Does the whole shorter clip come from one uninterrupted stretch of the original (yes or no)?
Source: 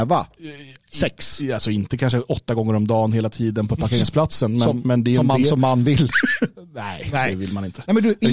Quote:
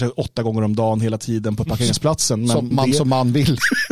no